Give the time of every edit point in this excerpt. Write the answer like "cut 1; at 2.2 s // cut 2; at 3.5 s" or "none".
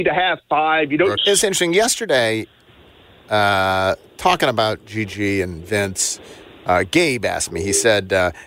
cut 1; at 1.2 s